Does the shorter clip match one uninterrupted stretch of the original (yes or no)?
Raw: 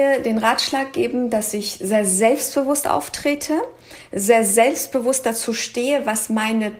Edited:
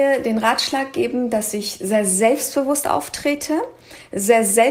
yes